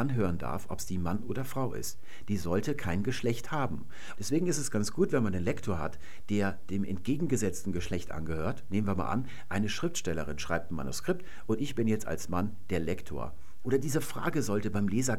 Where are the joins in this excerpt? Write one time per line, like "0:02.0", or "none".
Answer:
0:04.2
0:13.6

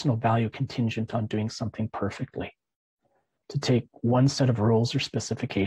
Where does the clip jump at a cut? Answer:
0:03.4

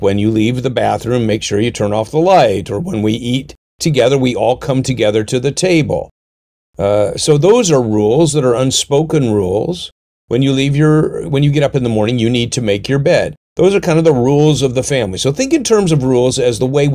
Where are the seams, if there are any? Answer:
none

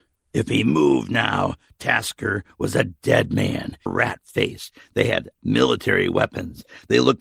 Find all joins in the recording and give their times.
0:03.9

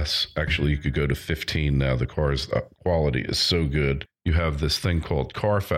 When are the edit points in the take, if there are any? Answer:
0:04.2

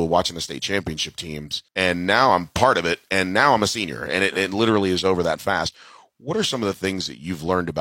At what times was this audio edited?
0:01.7

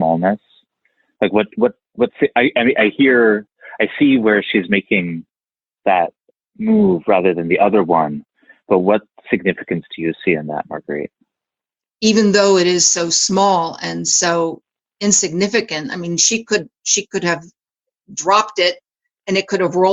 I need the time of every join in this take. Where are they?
0:11.8

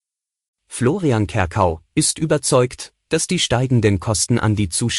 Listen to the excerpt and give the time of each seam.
0:01.9

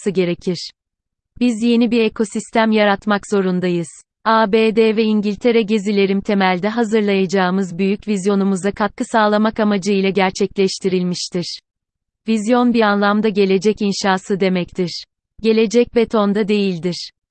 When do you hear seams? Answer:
0:04.2

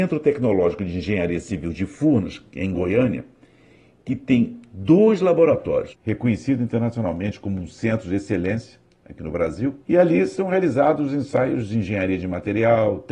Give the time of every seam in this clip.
0:05.9
0:09.8

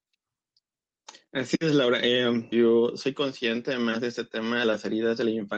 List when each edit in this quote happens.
0:02.5

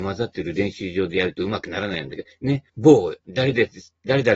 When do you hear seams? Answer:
0:02.7

